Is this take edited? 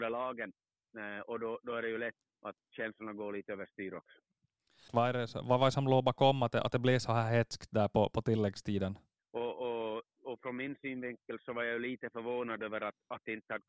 yes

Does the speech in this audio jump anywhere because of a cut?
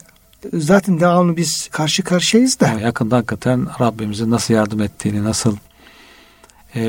yes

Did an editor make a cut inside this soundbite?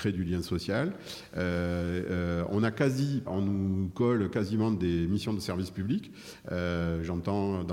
yes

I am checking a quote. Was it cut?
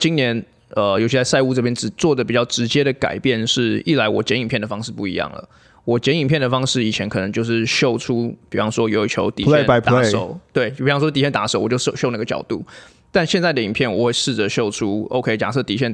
no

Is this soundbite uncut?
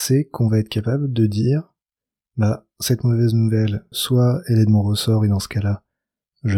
no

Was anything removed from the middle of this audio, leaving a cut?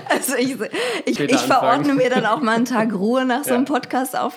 yes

